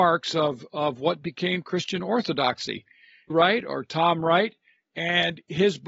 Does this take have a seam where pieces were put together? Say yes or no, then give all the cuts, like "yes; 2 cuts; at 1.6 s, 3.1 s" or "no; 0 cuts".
yes; 2 cuts; at 3.3 s, 4.8 s